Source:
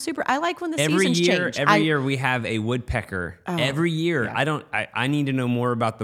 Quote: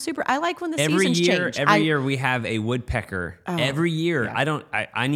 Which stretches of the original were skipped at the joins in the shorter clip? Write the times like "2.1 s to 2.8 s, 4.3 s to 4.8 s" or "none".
none